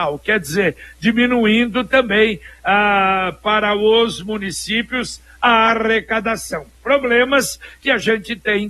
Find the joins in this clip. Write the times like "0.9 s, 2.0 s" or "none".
none